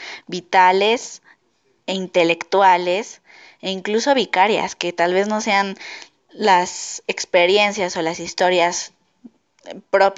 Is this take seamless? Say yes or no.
yes